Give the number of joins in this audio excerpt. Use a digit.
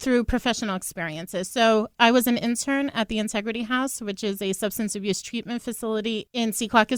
0